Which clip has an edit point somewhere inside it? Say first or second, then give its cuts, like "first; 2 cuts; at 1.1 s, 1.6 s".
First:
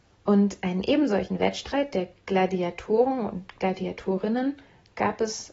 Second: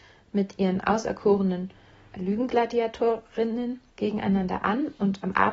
second; 2 cuts; at 2.2 s, 3.9 s